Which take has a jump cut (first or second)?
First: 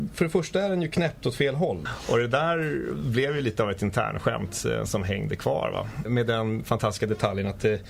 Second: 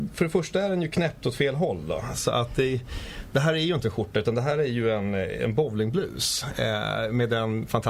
first